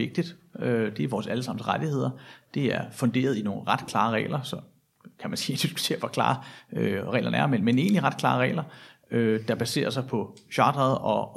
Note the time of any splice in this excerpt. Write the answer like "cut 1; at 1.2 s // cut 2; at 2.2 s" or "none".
none